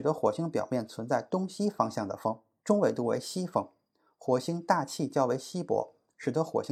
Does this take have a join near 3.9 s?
no; 1 cut; at 2.6 s

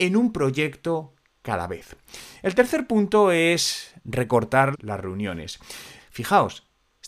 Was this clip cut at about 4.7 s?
yes; 2 cuts; at 4.7 s, 6.0 s

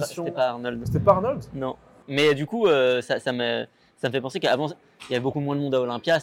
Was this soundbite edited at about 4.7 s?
no; 1 cut; at 2.0 s

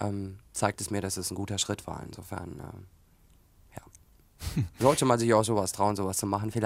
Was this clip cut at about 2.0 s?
no; 0 cuts

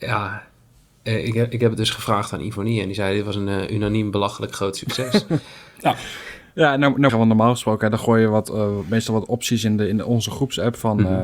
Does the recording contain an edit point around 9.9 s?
no; 1 cut; at 7.1 s

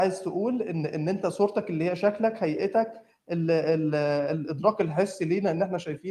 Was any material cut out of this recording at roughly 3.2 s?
no; 0 cuts

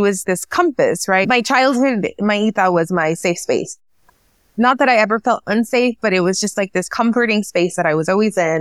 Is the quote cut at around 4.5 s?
no; 1 cut; at 1.2 s

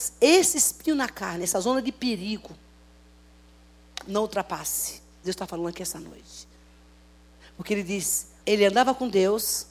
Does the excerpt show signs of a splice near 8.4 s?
yes; 2 cuts; at 5.2 s, 8.4 s

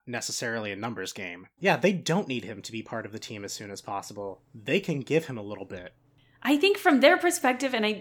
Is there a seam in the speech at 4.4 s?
no; 1 cut; at 1.6 s

